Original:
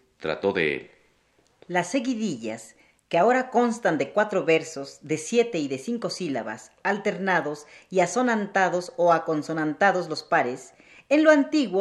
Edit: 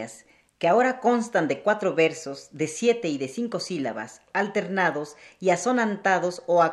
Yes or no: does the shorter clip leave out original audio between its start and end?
no